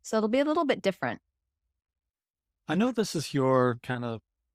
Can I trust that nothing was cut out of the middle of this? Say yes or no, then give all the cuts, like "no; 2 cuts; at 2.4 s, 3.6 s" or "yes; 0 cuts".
yes; 0 cuts